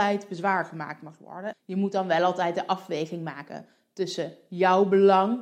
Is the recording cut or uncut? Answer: cut